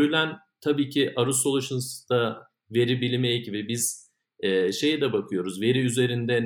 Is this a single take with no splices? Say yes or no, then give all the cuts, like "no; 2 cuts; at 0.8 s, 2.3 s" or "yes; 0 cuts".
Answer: yes; 0 cuts